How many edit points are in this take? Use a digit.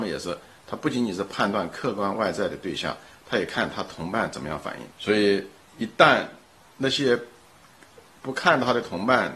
3